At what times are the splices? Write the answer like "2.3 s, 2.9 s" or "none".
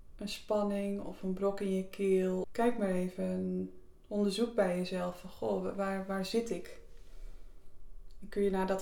2.4 s